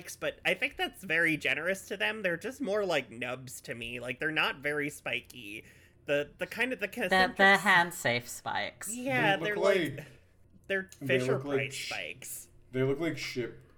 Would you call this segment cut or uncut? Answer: uncut